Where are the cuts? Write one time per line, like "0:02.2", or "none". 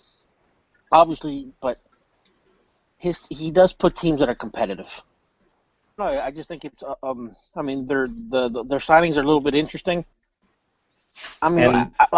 0:01.6
0:06.0